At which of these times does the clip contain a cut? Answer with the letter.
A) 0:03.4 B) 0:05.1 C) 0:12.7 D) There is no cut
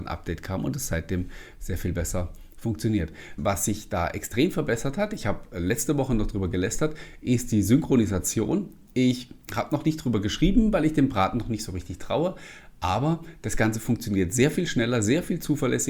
A